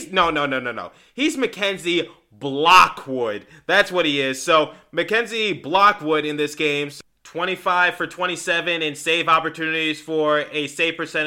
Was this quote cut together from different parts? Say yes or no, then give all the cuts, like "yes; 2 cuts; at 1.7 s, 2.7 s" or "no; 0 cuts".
no; 0 cuts